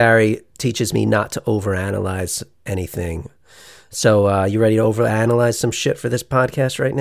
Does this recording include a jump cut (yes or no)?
no